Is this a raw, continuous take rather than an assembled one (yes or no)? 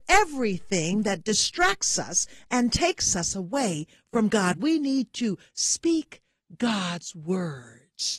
yes